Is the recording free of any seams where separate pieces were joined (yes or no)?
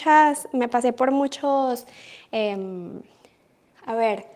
yes